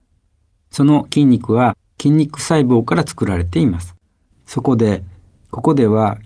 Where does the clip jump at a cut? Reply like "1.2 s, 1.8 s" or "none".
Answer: 4.3 s